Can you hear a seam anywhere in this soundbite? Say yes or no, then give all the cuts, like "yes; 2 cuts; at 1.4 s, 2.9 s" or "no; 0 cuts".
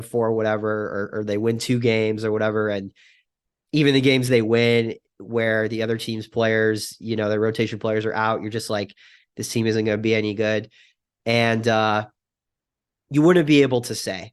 no; 0 cuts